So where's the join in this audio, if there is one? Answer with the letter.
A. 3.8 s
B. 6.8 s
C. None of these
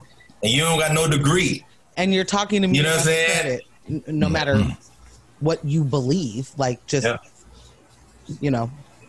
A